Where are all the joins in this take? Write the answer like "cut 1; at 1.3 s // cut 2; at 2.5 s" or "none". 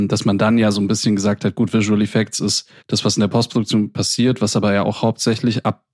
cut 1; at 2.8 s